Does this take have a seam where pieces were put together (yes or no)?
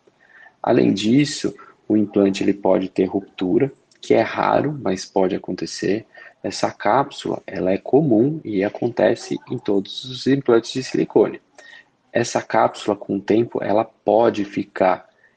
yes